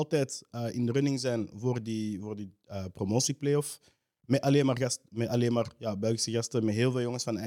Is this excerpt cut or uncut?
uncut